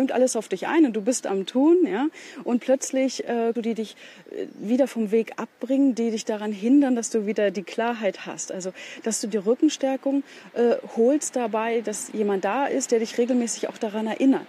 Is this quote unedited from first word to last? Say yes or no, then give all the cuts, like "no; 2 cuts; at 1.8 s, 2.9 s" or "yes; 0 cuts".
no; 1 cut; at 3.6 s